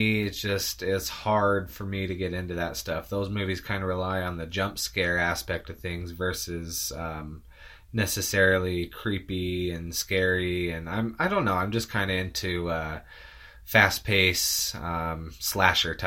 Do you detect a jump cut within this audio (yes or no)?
no